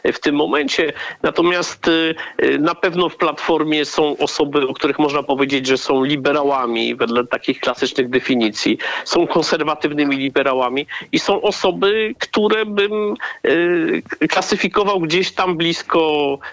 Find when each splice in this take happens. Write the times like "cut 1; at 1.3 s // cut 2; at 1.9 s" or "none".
none